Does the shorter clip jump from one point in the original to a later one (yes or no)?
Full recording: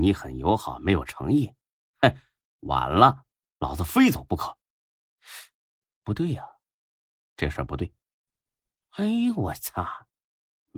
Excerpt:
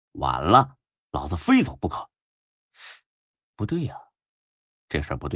no